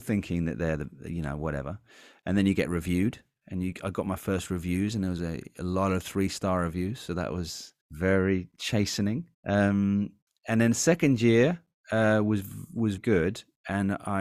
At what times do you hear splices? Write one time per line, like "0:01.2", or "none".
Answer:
0:07.8
0:09.3
0:13.0